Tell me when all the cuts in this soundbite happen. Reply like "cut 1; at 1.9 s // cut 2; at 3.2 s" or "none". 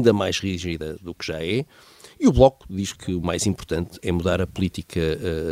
none